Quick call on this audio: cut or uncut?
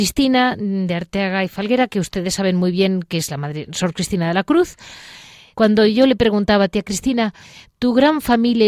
cut